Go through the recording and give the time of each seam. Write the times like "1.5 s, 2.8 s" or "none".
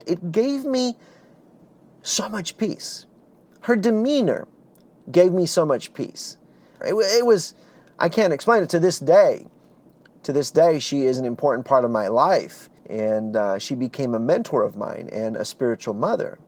6.8 s, 12.8 s